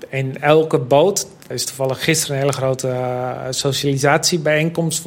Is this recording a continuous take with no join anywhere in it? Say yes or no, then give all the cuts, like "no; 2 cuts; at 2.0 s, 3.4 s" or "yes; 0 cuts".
no; 1 cut; at 1.5 s